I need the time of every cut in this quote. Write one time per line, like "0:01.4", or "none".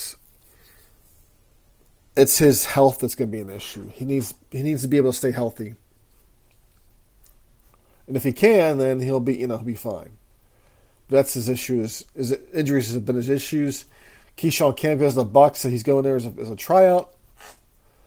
none